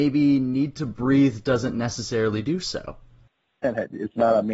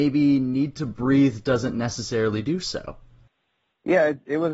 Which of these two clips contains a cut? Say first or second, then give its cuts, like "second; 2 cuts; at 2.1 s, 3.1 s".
first; 1 cut; at 3.6 s